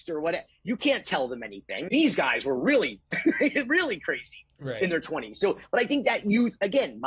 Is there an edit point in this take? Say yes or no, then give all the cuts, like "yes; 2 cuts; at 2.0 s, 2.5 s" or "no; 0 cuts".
yes; 1 cut; at 1.9 s